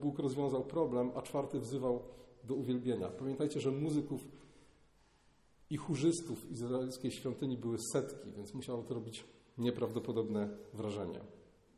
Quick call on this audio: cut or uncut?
uncut